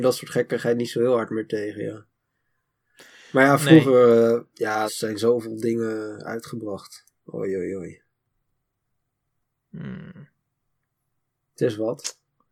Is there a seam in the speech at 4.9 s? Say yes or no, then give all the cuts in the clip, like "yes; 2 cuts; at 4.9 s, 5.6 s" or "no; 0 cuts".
yes; 1 cut; at 4.9 s